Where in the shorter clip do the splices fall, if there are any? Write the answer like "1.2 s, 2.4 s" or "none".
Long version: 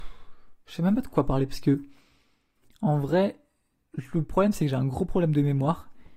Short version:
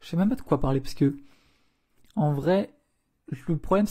none